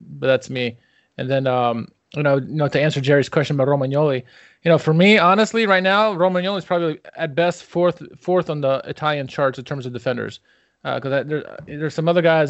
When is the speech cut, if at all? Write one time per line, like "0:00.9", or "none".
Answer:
none